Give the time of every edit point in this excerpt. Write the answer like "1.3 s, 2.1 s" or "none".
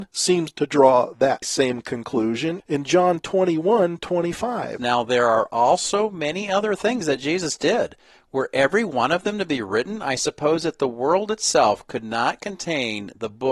1.4 s, 4.8 s